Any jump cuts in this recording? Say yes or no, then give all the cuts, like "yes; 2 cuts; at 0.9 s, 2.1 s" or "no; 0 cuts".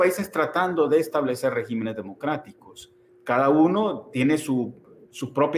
yes; 1 cut; at 3.1 s